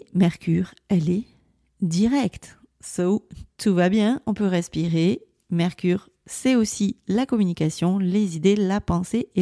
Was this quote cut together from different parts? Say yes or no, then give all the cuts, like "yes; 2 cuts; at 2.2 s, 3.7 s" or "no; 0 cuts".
no; 0 cuts